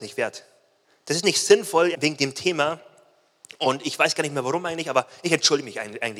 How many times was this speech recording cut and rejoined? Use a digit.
1